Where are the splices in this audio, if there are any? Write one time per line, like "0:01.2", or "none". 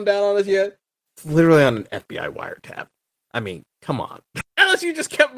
0:01.1
0:04.4